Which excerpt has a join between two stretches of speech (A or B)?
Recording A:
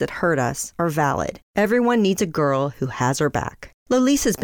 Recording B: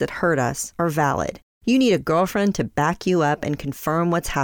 A